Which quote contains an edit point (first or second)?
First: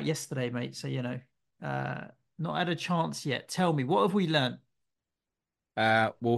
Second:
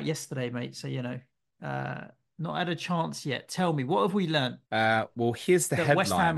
second